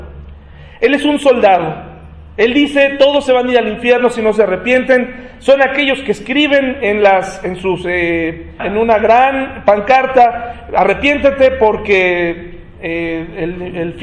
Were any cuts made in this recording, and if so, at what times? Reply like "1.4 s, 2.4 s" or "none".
8.6 s